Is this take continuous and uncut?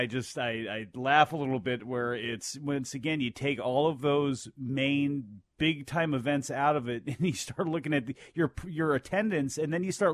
yes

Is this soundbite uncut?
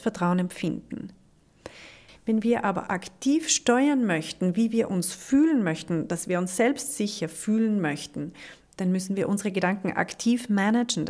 no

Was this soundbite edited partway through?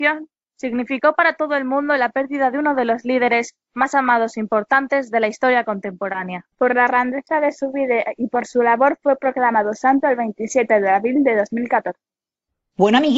yes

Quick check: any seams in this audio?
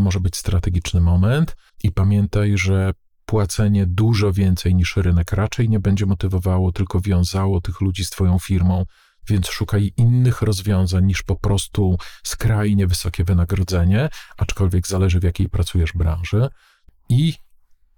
yes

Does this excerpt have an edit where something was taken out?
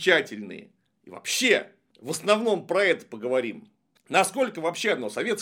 yes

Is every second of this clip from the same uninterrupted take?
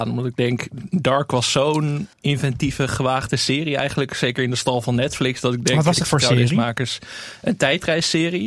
no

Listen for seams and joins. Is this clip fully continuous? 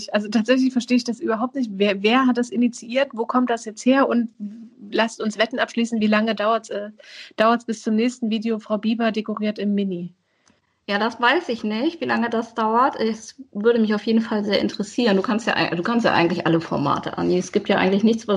yes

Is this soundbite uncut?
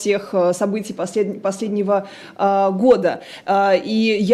yes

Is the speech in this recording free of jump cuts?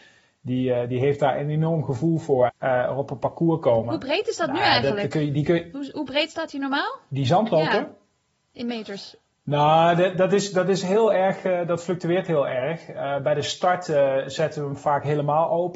no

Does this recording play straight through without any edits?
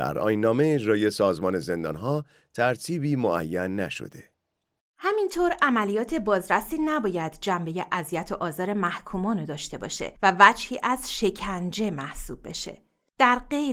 no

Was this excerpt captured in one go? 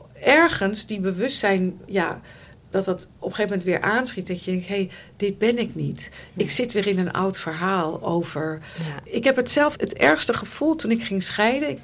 yes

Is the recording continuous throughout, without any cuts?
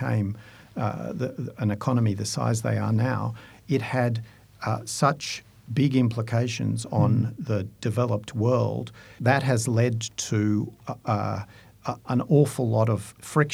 yes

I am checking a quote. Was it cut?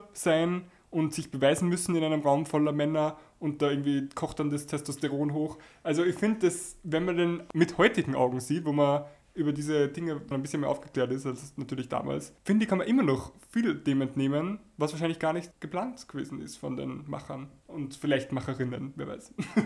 yes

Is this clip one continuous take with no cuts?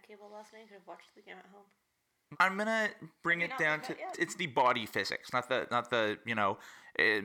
no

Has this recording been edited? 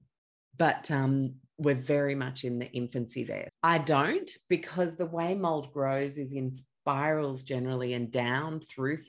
yes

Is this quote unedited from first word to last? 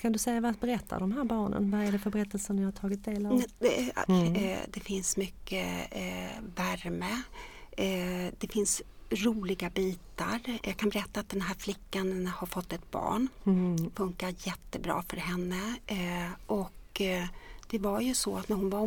no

